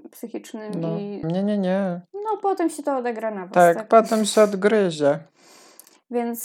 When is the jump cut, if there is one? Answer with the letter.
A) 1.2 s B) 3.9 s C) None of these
A